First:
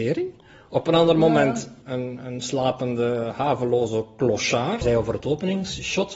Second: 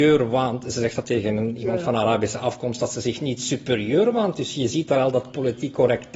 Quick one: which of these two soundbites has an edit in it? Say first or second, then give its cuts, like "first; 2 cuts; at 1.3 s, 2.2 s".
first; 2 cuts; at 1.8 s, 4.8 s